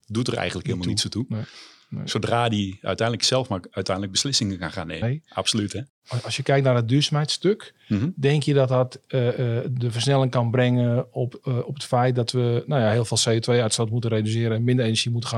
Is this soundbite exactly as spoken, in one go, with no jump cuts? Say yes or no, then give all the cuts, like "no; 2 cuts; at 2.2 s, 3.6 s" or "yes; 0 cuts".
no; 1 cut; at 5.0 s